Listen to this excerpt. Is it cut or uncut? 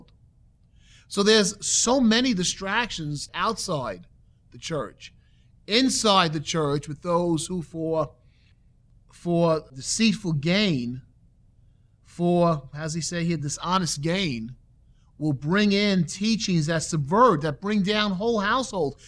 uncut